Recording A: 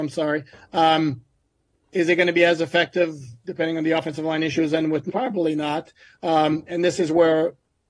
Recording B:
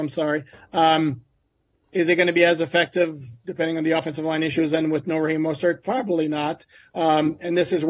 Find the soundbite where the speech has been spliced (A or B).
A